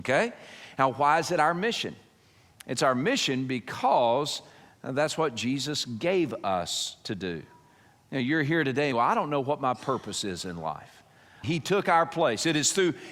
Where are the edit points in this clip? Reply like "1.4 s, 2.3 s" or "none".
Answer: 8.9 s, 11.4 s